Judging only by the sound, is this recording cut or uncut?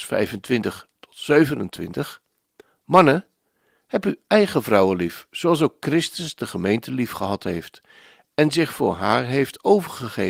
uncut